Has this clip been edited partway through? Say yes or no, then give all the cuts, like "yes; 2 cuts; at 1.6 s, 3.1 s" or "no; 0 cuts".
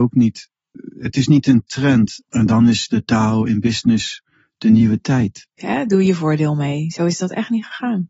yes; 2 cuts; at 2.2 s, 5.6 s